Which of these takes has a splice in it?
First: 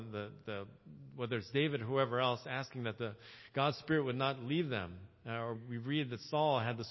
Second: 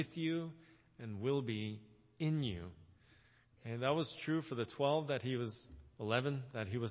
first; 1 cut; at 5.6 s

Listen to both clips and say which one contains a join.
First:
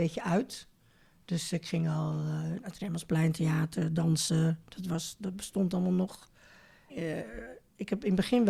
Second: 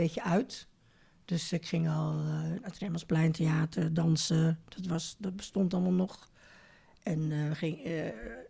first; 1 cut; at 6.9 s

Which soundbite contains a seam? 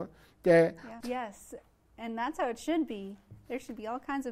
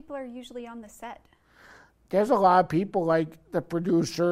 first; 1 cut; at 1.0 s

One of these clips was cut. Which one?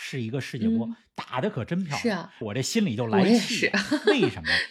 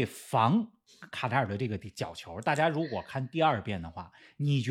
first; 1 cut; at 2.4 s

